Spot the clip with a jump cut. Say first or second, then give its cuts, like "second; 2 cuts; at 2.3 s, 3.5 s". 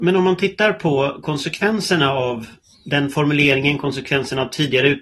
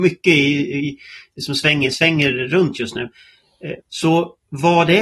second; 1 cut; at 3.8 s